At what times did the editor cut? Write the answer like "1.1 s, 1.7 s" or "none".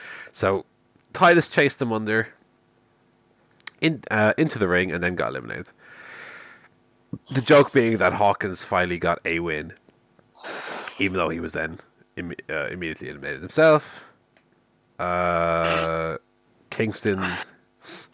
none